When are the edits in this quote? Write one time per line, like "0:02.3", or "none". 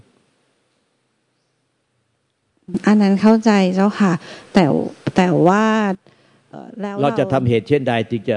0:06.5